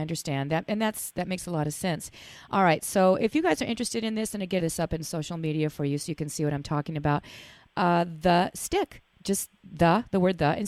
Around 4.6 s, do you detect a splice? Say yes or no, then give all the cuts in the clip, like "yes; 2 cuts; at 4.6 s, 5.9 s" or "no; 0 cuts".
yes; 1 cut; at 4.6 s